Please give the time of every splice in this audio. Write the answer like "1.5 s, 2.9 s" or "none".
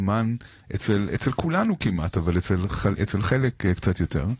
none